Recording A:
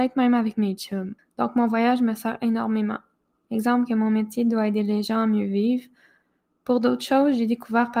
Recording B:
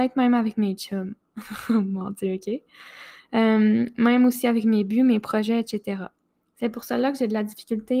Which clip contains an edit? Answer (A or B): A